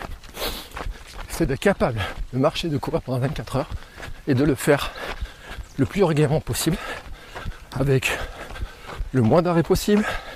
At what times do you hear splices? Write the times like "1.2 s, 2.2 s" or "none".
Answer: 1.2 s